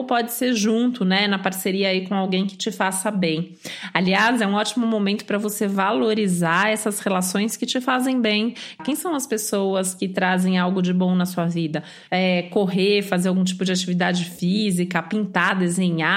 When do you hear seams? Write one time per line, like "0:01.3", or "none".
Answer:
0:08.8
0:12.1